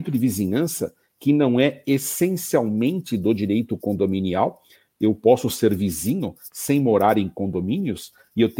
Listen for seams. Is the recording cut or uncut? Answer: uncut